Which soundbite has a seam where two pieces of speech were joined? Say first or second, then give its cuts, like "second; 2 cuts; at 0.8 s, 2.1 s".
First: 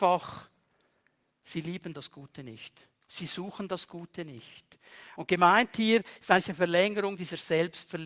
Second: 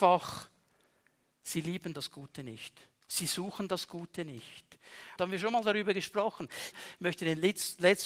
second; 2 cuts; at 5.2 s, 6.7 s